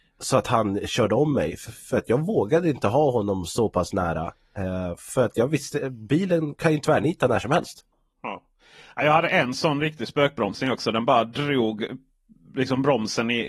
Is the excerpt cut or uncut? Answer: uncut